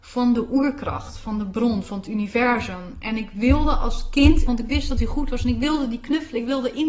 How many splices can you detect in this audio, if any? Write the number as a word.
one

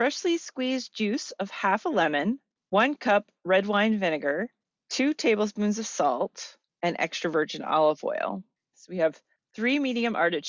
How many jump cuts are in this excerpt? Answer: two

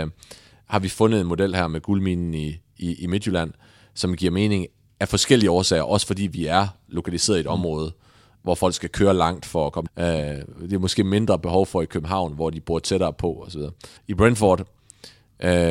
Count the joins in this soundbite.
two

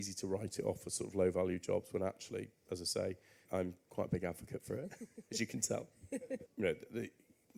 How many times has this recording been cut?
two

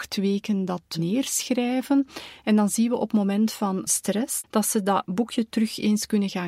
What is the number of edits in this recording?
one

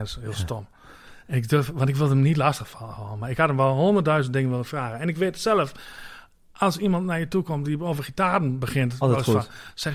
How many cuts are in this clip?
one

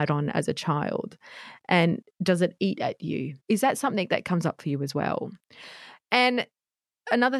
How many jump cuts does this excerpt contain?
one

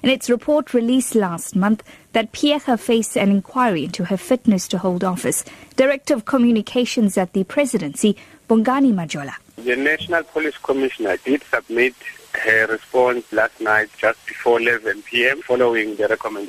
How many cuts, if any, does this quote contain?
one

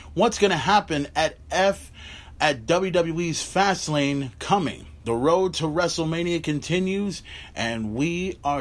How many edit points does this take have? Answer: zero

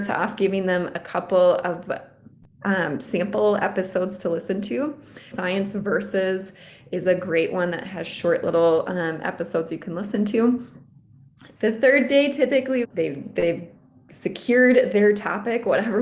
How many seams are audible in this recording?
three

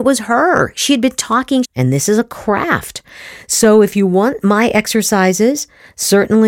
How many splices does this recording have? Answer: one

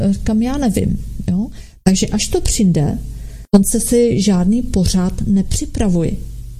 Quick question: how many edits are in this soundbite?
zero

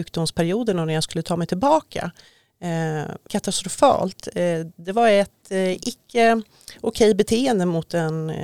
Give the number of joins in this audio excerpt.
one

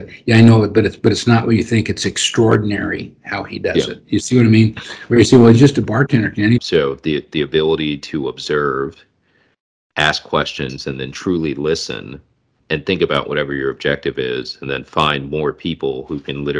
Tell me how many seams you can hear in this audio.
two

